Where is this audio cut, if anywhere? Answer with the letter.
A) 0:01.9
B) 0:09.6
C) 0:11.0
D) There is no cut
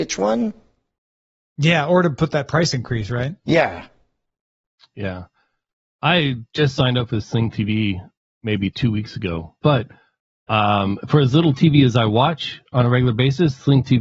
B